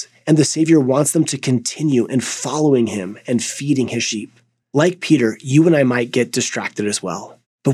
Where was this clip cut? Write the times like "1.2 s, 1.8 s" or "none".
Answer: 4.6 s